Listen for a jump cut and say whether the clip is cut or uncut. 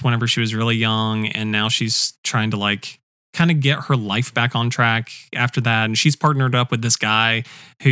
uncut